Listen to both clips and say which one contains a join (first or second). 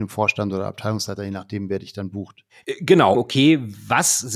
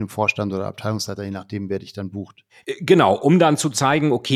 first